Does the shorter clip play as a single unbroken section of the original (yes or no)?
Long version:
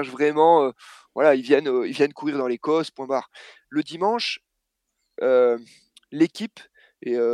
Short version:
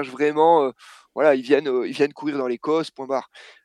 yes